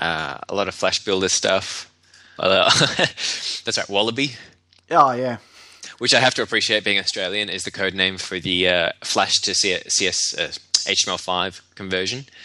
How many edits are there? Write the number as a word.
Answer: one